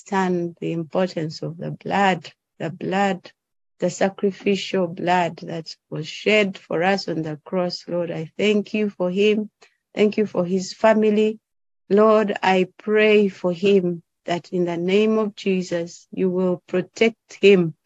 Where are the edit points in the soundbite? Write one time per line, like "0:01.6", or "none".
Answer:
none

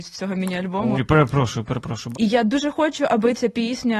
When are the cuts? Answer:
0:00.9
0:02.1

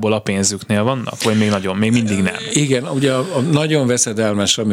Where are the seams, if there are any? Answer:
none

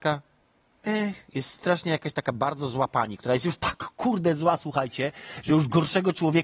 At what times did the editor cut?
none

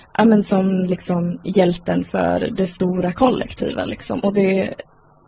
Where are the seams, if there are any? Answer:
0:04.2

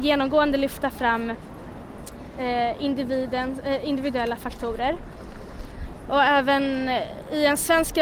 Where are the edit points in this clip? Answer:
none

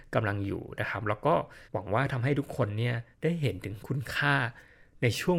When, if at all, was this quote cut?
0:01.6
0:03.1

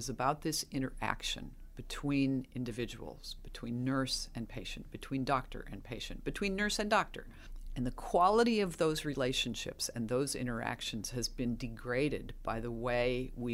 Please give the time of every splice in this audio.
none

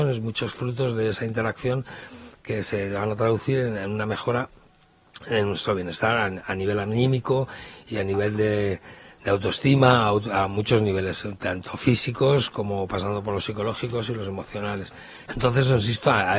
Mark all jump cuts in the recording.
0:15.3

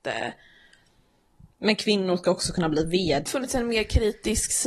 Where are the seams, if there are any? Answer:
0:03.3

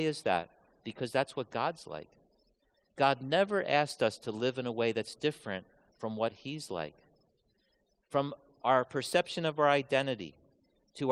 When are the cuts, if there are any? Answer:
none

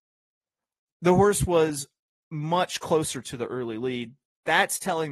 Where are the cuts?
none

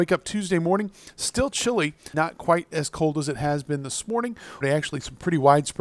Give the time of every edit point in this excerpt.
0:02.1
0:04.6

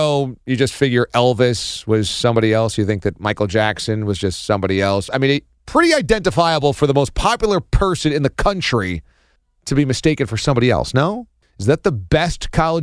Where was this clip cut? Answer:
0:05.1
0:11.4

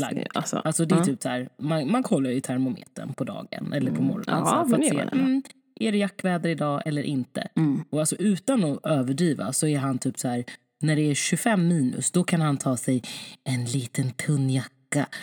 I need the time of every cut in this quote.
none

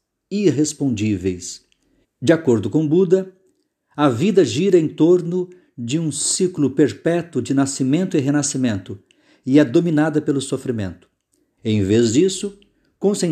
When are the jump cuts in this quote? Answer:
0:02.0
0:11.6

